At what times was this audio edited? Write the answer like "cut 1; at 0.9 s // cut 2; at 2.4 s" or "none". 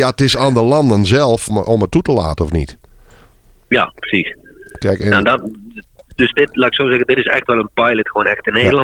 cut 1; at 1.5 s